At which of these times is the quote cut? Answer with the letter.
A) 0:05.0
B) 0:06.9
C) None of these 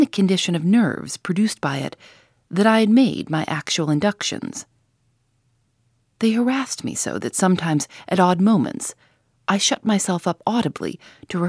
C